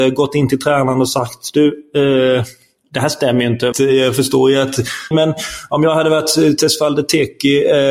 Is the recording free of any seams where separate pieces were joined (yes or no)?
no